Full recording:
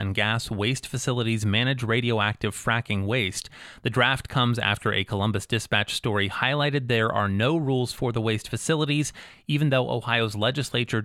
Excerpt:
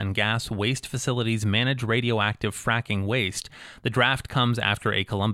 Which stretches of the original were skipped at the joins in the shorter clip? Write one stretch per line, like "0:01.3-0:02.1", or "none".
none